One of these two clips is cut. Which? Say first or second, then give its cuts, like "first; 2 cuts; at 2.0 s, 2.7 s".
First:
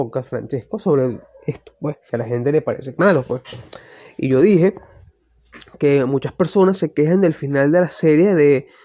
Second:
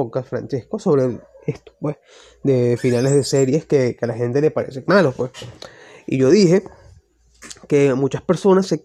first; 1 cut; at 2.1 s